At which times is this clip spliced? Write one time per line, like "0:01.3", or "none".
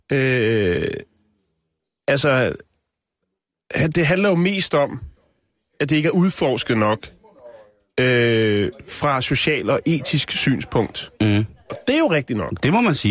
none